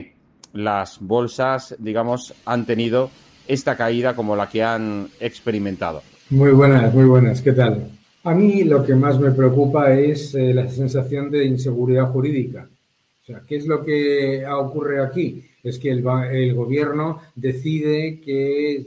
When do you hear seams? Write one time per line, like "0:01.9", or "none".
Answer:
0:08.0